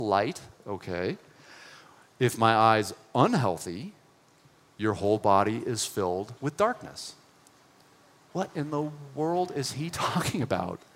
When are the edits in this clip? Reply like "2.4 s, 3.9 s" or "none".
6.4 s